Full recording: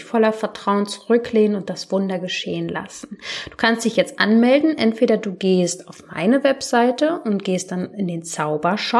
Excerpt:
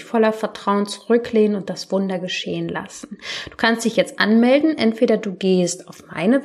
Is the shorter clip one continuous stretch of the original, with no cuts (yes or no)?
yes